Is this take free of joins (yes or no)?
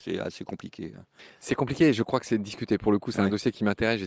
yes